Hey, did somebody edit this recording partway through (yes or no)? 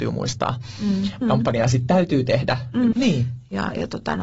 yes